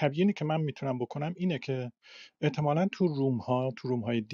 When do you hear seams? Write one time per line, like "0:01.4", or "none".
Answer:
none